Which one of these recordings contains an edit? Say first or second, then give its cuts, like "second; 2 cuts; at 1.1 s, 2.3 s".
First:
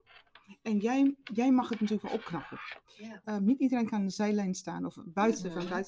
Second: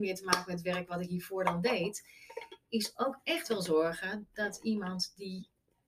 first; 1 cut; at 3.2 s